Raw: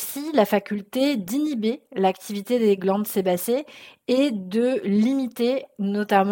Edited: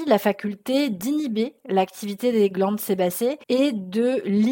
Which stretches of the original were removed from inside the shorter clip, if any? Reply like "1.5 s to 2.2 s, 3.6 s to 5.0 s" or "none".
3.7 s to 4.0 s